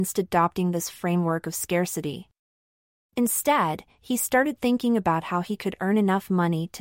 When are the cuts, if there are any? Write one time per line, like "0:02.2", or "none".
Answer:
none